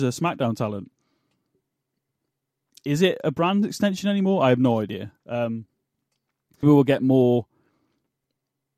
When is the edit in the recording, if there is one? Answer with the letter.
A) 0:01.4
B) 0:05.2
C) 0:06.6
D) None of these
C